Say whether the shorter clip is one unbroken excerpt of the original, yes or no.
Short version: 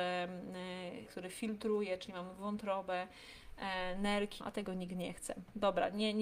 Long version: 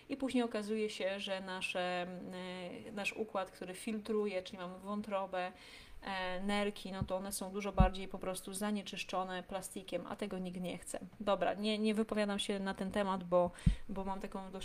no